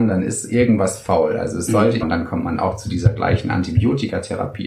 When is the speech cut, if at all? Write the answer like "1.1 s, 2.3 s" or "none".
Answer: 2.0 s

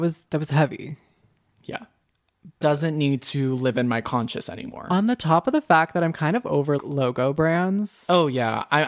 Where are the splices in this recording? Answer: 2.6 s, 6.8 s

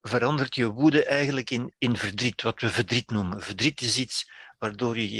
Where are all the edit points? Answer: 1.7 s

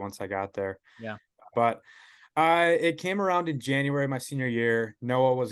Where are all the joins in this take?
1.5 s

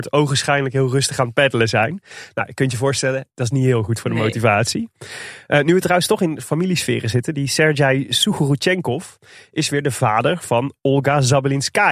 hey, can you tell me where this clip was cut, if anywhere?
none

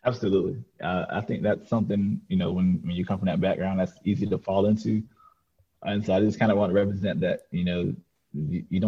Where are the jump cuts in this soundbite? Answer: none

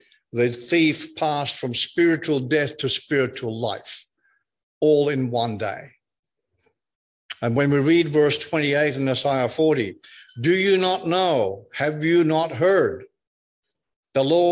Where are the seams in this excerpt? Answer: none

